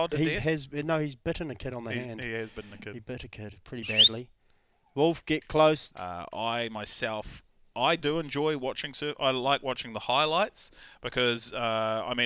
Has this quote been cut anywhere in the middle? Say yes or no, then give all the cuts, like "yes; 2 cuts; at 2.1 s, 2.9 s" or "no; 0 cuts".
yes; 1 cut; at 5.9 s